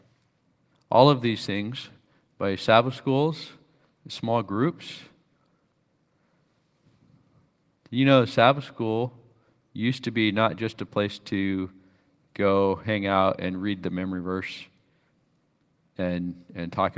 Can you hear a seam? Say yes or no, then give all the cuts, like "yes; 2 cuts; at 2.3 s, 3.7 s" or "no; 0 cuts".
no; 0 cuts